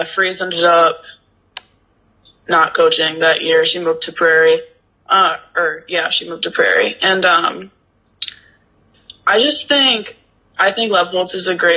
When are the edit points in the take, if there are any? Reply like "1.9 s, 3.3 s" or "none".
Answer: none